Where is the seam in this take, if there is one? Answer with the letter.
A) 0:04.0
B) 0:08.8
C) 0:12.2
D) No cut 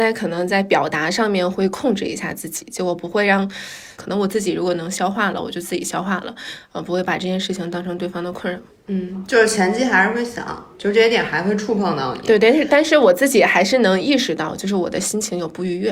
A